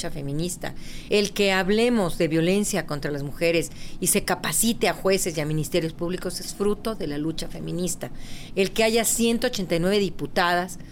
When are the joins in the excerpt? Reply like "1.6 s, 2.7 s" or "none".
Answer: 1.1 s, 8.5 s